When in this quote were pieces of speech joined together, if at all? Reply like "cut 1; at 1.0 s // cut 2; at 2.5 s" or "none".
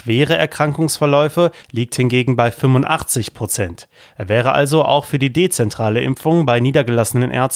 cut 1; at 1.6 s // cut 2; at 4.0 s